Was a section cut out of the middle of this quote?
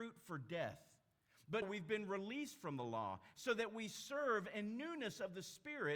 yes; 2 cuts; at 1.6 s, 3.3 s

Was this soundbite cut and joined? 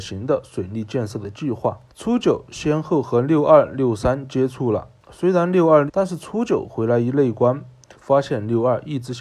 yes; 3 cuts; at 1.9 s, 5.9 s, 7.9 s

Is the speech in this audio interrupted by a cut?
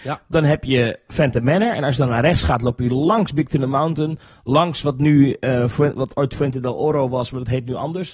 no; 0 cuts

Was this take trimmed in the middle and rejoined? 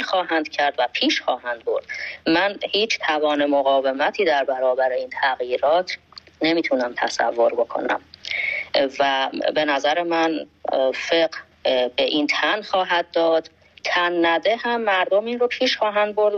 yes; 1 cut; at 11.5 s

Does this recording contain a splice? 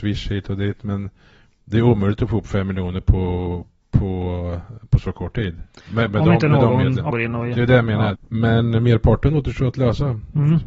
yes; 2 cuts; at 7.1 s, 8.1 s

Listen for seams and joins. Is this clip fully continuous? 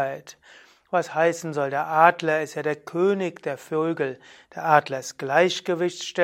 no; 1 cut; at 4.4 s

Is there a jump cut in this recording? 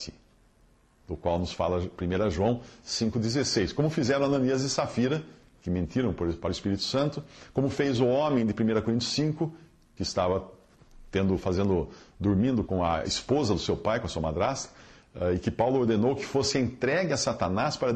yes; 1 cut; at 12.7 s

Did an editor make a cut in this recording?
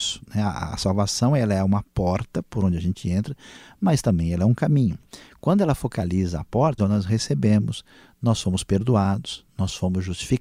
yes; 1 cut; at 6.8 s

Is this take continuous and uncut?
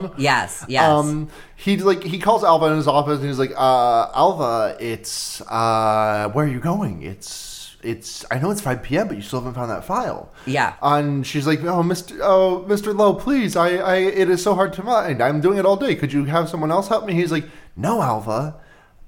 yes; 0 cuts

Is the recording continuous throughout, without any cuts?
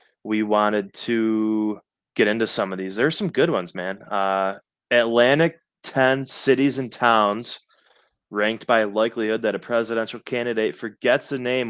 yes; 0 cuts

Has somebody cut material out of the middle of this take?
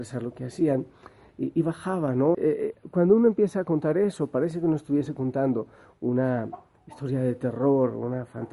yes; 1 cut; at 2.3 s

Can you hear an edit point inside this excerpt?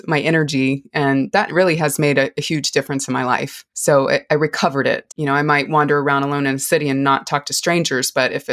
yes; 2 cuts; at 3.7 s, 5.1 s

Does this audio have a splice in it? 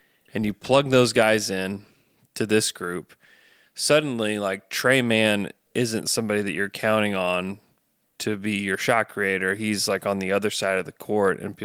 no; 0 cuts

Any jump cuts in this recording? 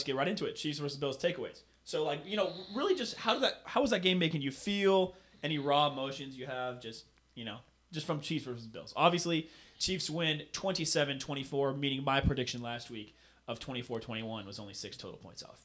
no; 0 cuts

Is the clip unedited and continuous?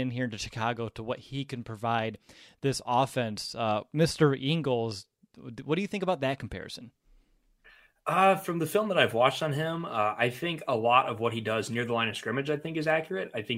yes; 0 cuts

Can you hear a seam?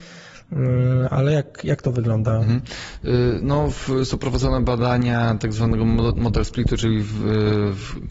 no; 0 cuts

